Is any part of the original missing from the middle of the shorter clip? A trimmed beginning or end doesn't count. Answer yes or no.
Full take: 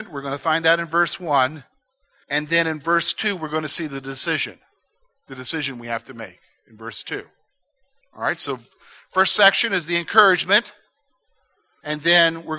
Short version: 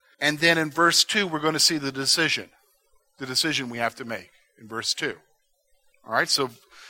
no